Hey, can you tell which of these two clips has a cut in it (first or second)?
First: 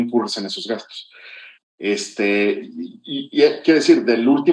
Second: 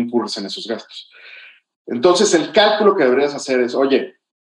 first